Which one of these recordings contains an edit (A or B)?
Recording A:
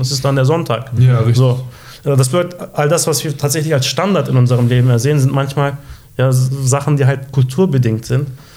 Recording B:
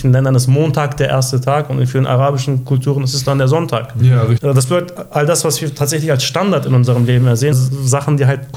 B